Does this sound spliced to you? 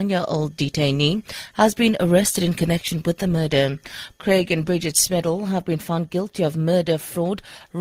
yes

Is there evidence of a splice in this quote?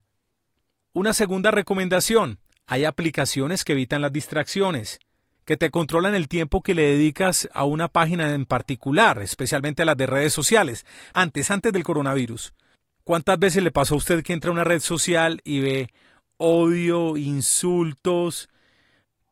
yes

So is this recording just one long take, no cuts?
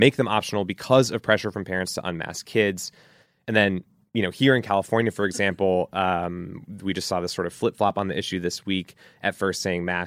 yes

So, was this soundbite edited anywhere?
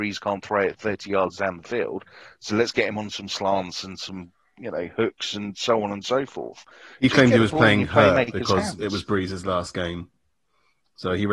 no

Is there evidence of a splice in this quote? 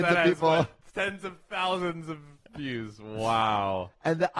no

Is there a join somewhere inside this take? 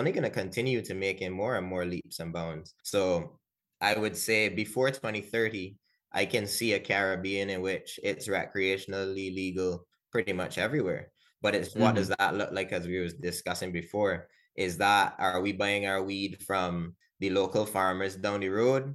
yes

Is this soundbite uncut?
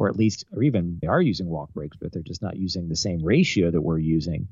no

